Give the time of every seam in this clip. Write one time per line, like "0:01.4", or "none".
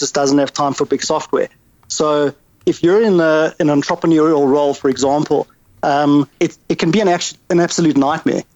0:06.3